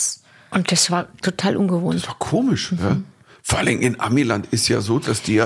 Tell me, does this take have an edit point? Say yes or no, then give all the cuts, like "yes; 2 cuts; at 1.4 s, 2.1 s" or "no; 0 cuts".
no; 0 cuts